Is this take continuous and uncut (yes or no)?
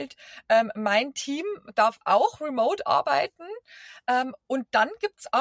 yes